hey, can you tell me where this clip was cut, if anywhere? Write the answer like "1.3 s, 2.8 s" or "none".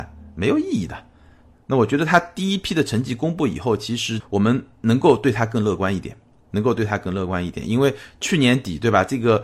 1.5 s